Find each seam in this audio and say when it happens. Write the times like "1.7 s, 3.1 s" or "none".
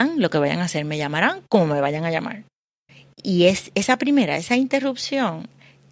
none